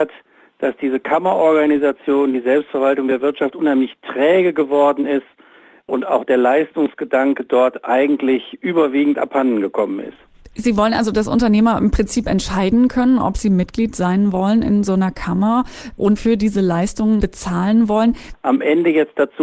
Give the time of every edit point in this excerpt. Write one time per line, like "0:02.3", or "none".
0:16.2
0:18.3